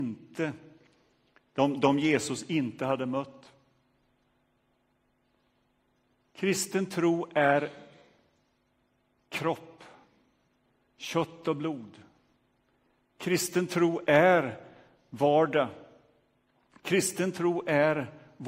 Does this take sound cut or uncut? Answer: uncut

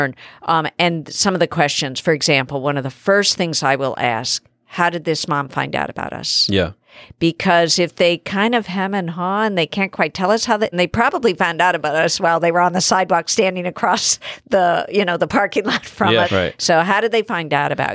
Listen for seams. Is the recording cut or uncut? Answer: cut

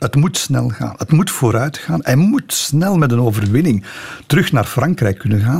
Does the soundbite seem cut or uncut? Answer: uncut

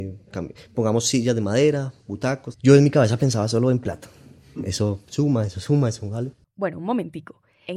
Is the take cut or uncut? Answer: cut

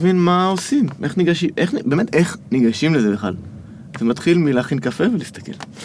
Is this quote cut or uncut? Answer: cut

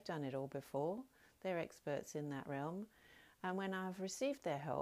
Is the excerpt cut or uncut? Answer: uncut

